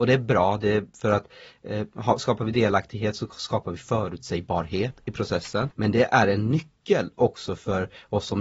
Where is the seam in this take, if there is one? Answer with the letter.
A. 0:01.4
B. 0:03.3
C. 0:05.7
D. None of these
C